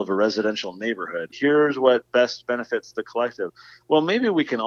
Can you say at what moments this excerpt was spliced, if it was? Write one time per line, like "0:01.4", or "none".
0:01.3